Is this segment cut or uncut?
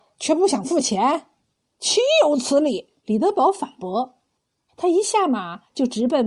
cut